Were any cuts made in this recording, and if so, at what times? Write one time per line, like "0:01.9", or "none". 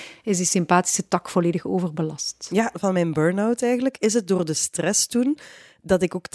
0:02.7

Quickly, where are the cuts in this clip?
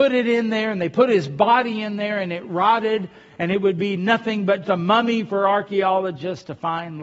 0:03.4
0:04.6

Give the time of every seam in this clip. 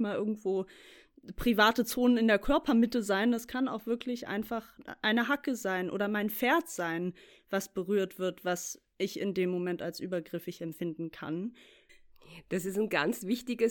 none

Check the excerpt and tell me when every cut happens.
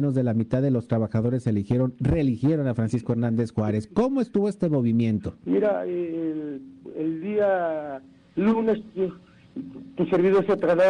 none

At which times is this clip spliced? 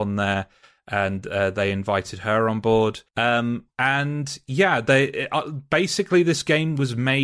0:03.1

